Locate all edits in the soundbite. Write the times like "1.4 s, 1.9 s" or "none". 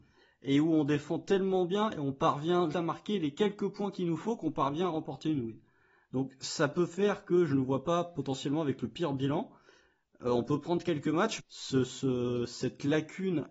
2.7 s, 11.4 s